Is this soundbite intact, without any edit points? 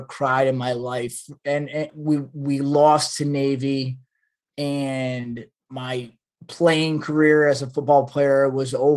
no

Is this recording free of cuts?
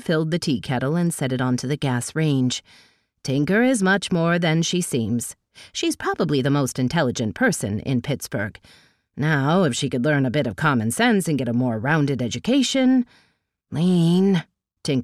yes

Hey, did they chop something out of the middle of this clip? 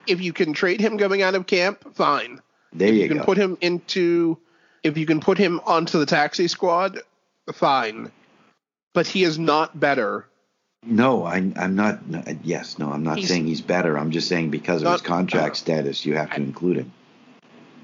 no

